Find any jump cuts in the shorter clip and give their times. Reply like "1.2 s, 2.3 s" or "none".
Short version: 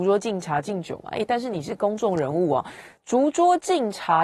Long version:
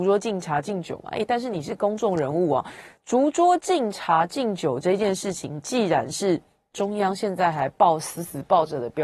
none